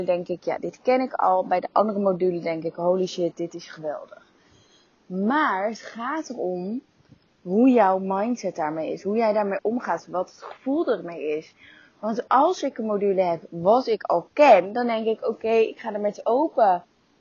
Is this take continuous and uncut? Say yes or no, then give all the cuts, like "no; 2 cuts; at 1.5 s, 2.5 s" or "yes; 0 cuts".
yes; 0 cuts